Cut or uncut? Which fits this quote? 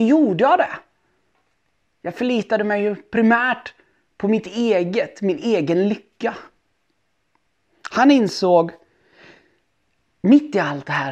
uncut